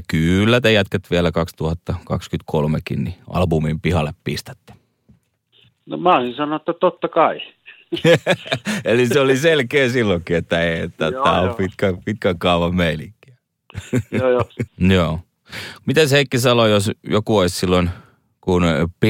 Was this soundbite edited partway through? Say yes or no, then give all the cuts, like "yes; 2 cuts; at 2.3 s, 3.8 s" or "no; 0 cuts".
yes; 2 cuts; at 14.7 s, 15.8 s